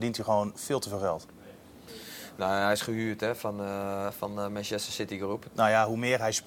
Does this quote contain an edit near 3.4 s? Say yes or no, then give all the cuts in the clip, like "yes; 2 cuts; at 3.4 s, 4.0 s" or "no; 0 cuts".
no; 1 cut; at 5.5 s